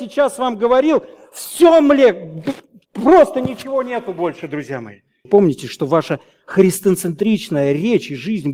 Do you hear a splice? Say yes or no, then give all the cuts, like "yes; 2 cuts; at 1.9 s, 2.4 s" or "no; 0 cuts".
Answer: yes; 1 cut; at 5.3 s